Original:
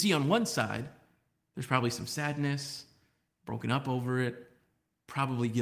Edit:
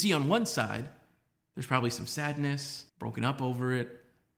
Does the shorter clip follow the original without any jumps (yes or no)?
no